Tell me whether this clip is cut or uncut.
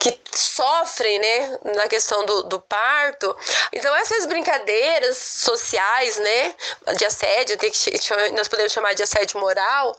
cut